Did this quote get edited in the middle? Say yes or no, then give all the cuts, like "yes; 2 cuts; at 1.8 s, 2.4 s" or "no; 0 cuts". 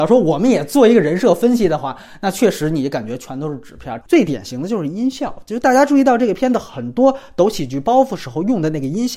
yes; 1 cut; at 4.0 s